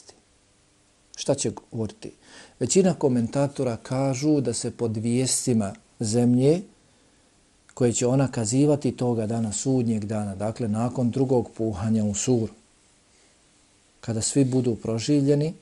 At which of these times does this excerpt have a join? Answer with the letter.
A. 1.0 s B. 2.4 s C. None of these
C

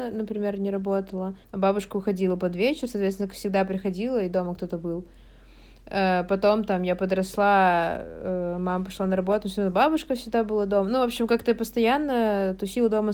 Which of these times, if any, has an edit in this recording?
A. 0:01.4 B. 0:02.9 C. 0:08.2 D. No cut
A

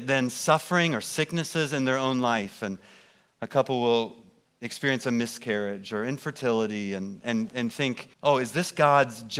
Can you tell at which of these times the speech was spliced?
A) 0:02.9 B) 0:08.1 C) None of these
B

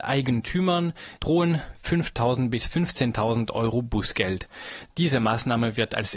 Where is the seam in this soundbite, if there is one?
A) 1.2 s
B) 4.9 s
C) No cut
A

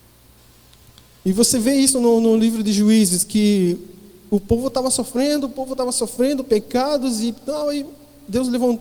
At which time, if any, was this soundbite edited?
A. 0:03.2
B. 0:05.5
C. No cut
C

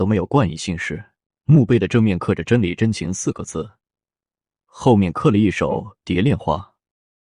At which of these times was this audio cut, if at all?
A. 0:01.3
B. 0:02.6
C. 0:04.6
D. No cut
A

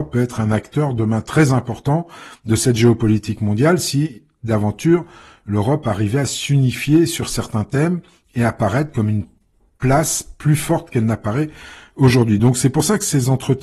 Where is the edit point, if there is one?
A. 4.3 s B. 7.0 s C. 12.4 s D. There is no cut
D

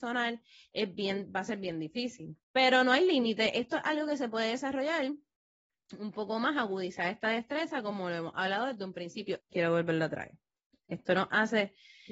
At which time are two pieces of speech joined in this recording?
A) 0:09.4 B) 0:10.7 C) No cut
A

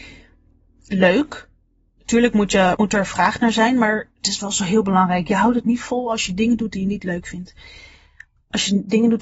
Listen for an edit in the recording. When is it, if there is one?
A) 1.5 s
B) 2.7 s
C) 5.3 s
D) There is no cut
B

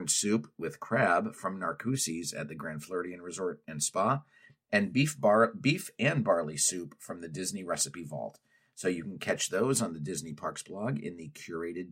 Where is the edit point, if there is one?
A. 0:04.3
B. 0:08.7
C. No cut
C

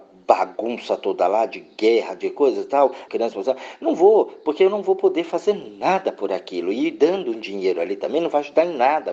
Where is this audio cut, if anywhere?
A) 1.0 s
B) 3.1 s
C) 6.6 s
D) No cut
B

